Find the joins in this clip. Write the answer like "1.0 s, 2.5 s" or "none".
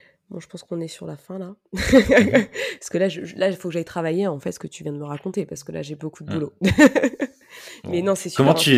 none